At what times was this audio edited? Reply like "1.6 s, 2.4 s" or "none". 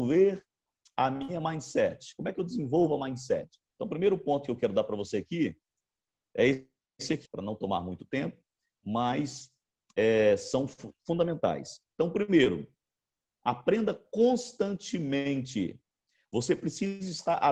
3.7 s, 7.2 s